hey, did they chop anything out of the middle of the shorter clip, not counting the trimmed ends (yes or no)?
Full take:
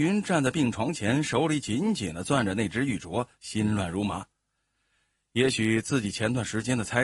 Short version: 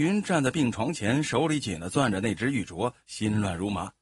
yes